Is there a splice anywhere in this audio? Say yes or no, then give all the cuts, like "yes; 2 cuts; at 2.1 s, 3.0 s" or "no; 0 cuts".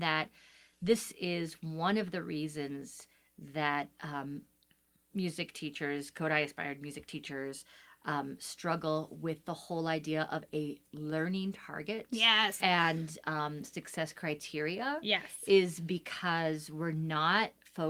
yes; 1 cut; at 12.6 s